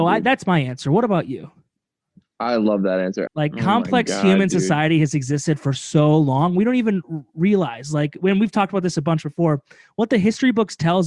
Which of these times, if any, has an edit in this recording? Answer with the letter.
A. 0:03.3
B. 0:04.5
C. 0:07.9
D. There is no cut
A